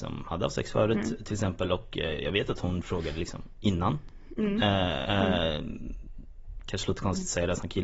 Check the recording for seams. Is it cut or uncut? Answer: cut